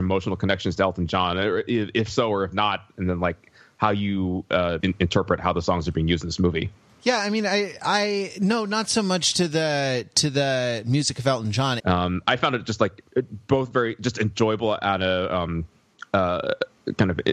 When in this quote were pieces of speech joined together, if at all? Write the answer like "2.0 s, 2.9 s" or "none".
4.8 s, 11.8 s